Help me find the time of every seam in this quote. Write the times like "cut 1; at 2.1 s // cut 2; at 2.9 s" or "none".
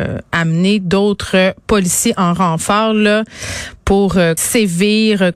cut 1; at 4.4 s